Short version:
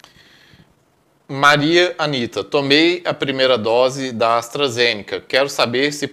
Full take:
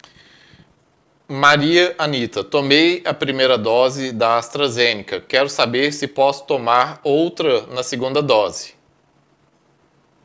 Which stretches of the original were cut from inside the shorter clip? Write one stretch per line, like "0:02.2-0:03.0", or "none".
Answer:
none